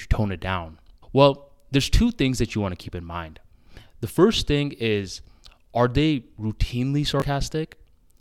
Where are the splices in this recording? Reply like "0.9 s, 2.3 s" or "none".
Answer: 1.0 s